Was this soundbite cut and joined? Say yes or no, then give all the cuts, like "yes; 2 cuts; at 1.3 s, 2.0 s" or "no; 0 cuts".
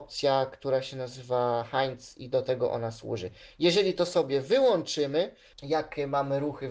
yes; 1 cut; at 5.5 s